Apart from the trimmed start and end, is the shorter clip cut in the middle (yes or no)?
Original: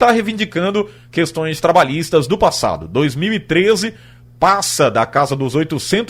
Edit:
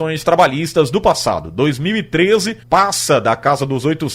yes